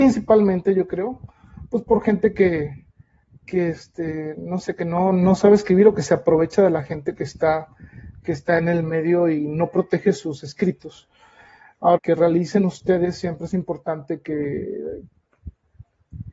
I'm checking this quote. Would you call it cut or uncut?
cut